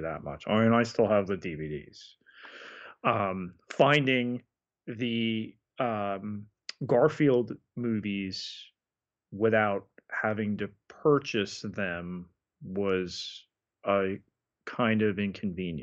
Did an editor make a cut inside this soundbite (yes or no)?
no